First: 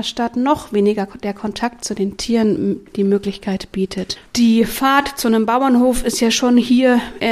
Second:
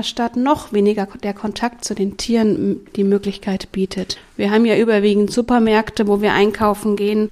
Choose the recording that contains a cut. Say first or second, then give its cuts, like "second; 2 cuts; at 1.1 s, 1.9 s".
first; 1 cut; at 4.3 s